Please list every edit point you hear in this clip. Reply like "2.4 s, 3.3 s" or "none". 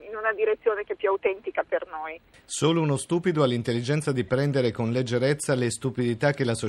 2.3 s